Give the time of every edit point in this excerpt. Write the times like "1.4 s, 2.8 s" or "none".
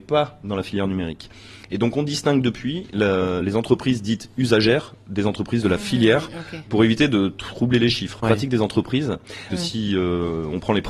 8.2 s, 9.5 s